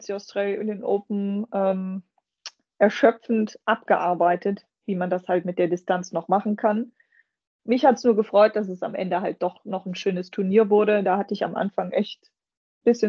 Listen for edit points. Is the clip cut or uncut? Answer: uncut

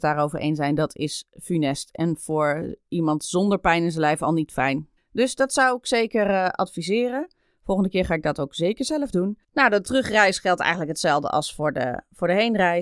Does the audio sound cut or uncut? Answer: cut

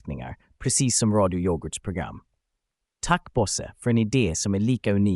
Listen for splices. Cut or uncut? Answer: uncut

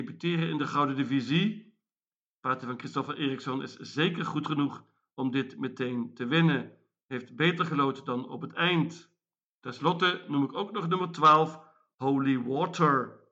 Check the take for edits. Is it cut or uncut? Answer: uncut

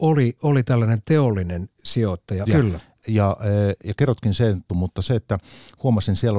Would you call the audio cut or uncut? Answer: cut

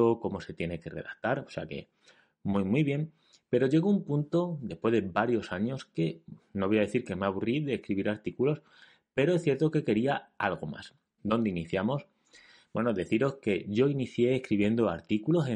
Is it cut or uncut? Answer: cut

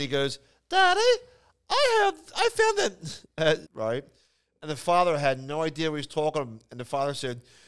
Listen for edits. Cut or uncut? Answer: cut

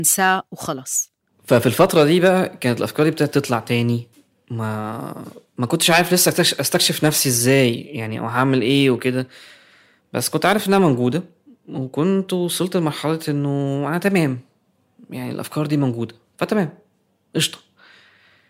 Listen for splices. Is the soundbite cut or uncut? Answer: uncut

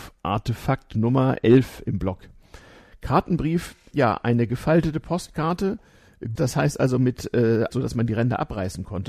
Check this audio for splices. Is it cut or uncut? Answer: cut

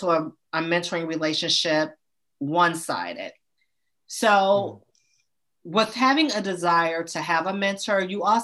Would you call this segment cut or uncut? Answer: uncut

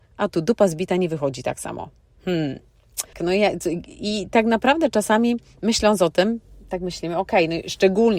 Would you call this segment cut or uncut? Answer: cut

